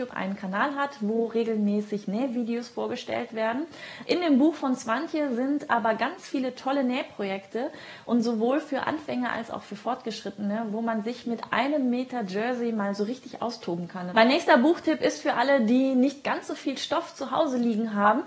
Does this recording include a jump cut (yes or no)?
yes